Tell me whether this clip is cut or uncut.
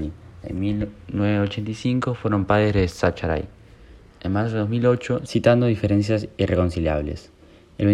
cut